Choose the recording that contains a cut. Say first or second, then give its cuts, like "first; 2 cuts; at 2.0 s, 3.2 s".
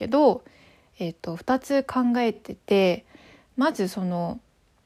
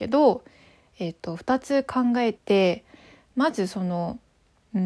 second; 1 cut; at 2.3 s